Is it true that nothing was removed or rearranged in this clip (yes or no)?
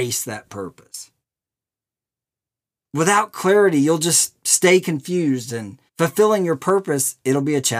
no